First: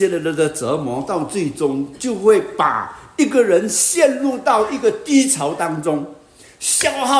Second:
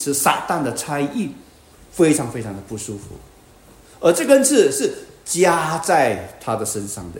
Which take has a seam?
second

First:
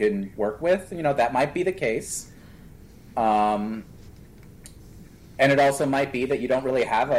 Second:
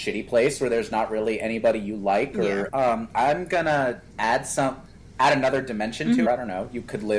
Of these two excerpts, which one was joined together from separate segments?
second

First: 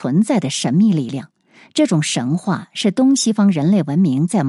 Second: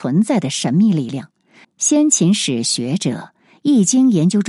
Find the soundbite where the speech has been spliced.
second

